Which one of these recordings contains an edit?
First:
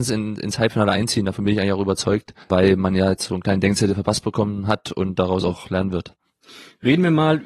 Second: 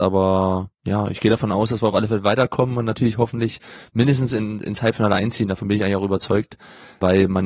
first; 1 cut; at 2.4 s

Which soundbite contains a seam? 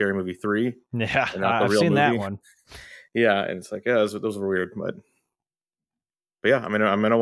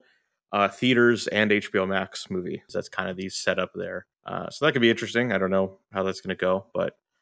second; 2 cuts; at 2.7 s, 4.1 s

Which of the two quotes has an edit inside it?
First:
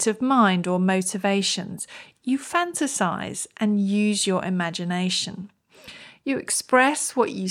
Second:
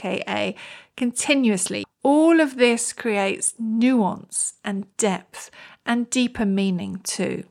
second; 1 cut; at 1.8 s

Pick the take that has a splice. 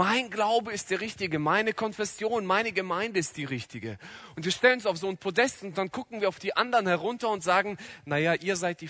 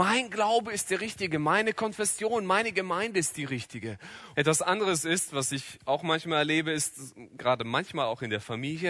second; 2 cuts; at 4.3 s, 7.4 s

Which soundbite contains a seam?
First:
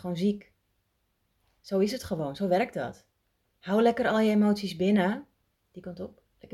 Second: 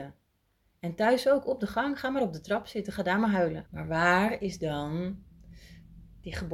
second; 1 cut; at 3.6 s

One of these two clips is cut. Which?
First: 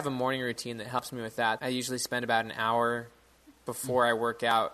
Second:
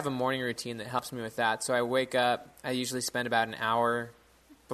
first; 1 cut; at 1.6 s

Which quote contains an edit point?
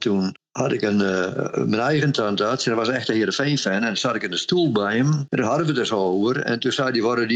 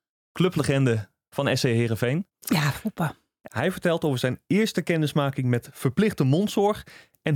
second; 1 cut; at 3.5 s

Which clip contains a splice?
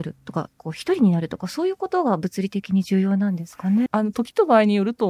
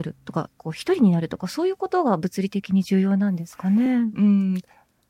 first; 1 cut; at 3.9 s

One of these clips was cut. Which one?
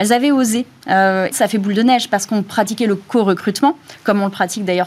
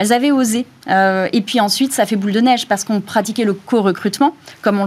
first; 1 cut; at 1.3 s

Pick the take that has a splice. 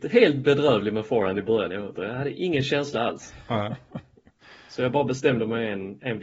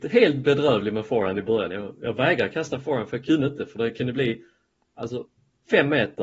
first; 1 cut; at 2.0 s

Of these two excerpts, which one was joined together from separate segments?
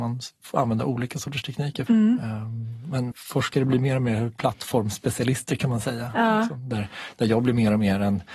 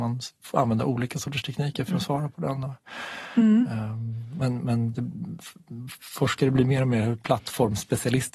first; 2 cuts; at 1.9 s, 3.1 s

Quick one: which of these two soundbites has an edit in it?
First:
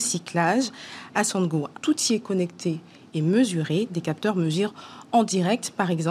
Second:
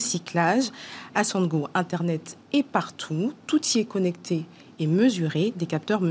first; 1 cut; at 1.7 s

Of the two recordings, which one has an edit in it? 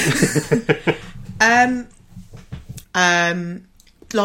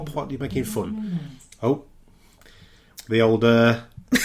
first; 1 cut; at 2.8 s

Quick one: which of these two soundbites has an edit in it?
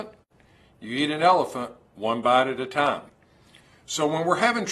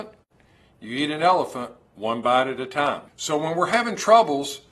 second; 1 cut; at 3.1 s

